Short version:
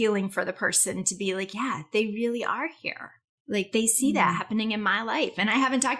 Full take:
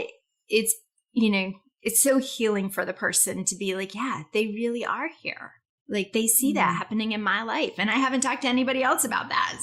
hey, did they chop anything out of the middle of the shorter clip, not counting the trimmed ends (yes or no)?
no